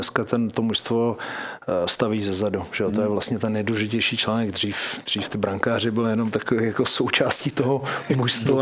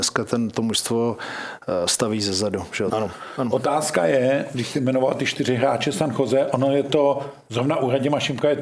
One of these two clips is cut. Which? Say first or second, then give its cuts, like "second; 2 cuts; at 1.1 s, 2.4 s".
second; 1 cut; at 2.9 s